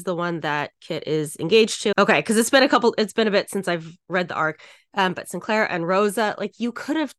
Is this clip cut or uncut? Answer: cut